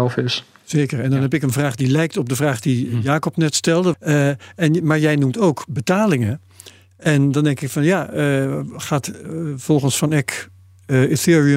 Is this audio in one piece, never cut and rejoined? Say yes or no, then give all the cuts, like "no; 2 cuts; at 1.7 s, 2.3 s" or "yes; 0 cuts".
no; 1 cut; at 3.9 s